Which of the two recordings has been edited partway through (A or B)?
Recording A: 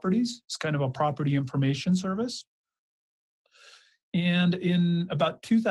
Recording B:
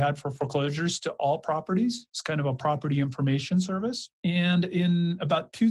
B